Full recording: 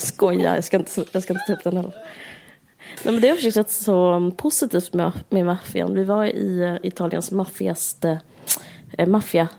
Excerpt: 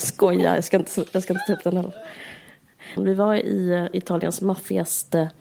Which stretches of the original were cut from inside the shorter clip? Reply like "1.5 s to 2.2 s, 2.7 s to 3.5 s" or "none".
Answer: 3.0 s to 5.9 s